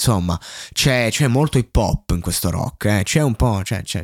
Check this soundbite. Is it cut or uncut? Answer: uncut